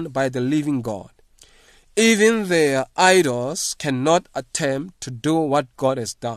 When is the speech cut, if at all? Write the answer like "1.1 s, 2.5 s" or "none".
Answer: none